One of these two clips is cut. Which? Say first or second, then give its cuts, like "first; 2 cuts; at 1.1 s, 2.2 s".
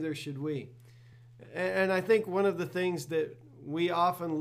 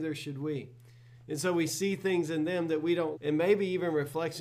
second; 2 cuts; at 1.1 s, 3.1 s